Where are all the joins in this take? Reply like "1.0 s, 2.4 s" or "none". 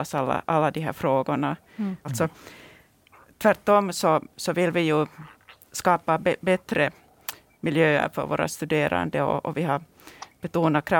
2.0 s